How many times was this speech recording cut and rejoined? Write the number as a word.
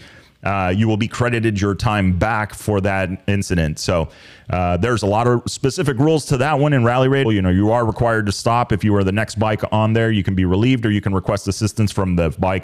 one